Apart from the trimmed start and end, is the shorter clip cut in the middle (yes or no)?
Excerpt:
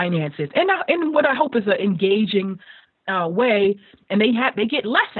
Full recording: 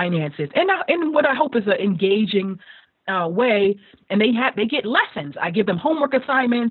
no